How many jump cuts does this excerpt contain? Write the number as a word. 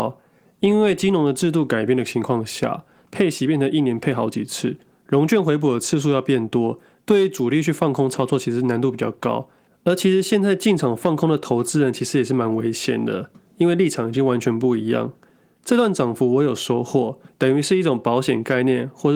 two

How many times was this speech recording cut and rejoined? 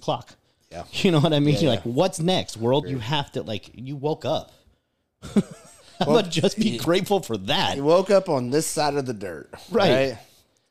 one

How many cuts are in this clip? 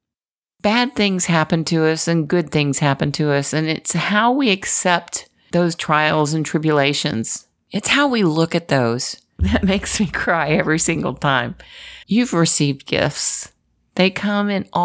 three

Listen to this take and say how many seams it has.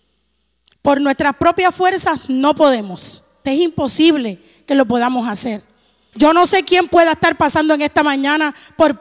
two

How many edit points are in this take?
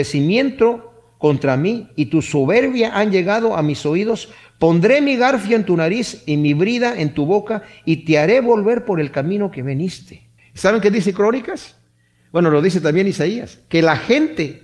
one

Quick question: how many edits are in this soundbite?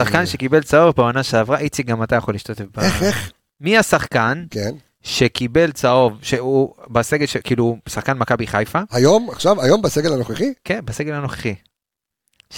zero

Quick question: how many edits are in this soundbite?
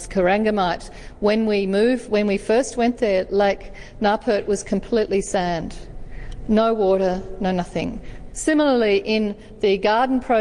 one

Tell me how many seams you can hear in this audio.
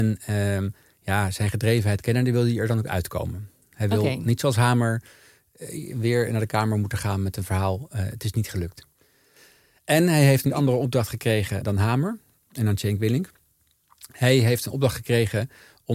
zero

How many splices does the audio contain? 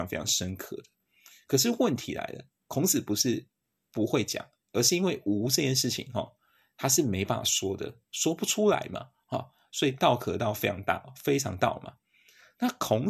zero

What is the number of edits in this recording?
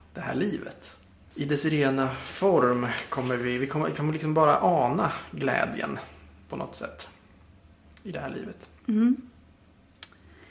one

